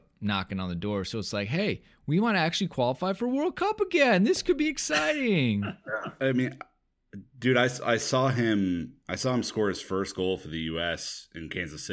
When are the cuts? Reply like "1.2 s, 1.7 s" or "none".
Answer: 6.2 s